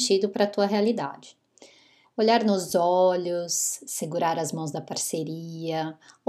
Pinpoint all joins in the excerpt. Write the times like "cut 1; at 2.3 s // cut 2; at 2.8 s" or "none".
cut 1; at 2.0 s